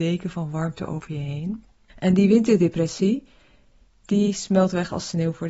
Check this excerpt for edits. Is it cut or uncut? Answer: uncut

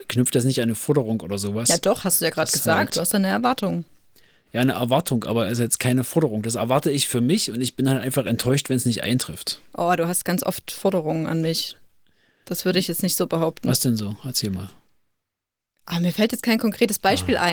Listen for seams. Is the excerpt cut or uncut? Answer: uncut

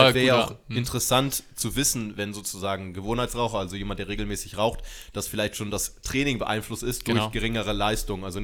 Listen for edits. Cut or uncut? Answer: uncut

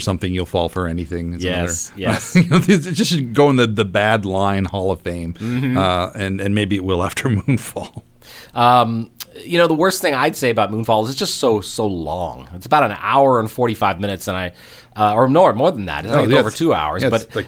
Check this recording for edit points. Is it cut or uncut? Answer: uncut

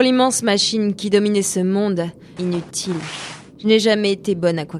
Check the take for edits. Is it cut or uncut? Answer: cut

